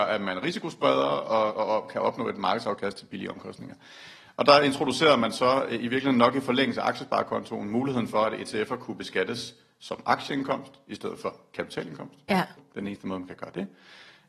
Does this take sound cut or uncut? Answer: cut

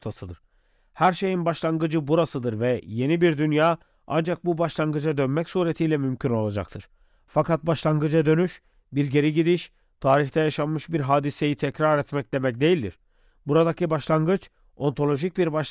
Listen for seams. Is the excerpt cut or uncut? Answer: uncut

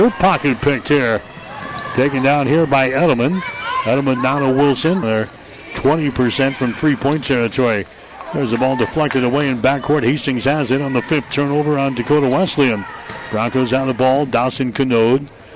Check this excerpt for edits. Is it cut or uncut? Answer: cut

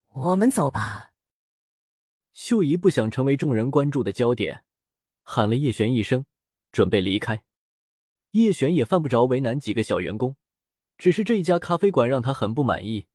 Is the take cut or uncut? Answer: uncut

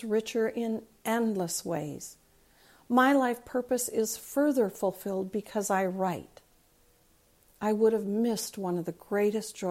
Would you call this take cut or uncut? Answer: uncut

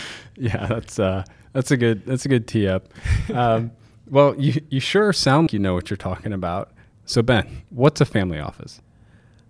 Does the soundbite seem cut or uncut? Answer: cut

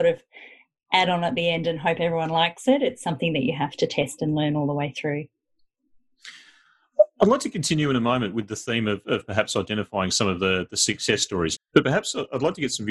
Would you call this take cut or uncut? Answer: cut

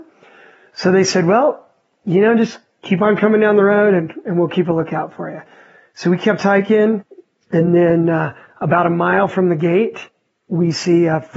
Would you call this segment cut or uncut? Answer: uncut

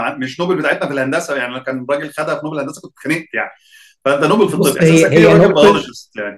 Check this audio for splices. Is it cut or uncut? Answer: uncut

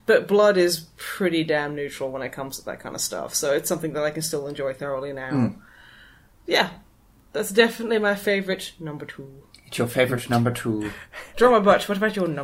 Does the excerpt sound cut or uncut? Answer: uncut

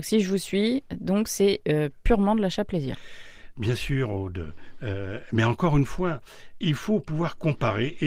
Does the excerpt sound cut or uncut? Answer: uncut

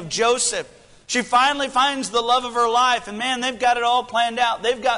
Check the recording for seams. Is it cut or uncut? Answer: uncut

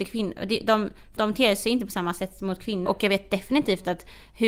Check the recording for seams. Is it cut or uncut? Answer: cut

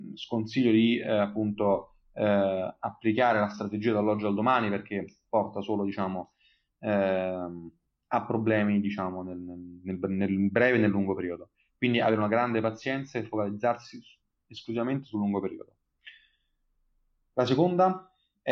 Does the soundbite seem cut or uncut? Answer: uncut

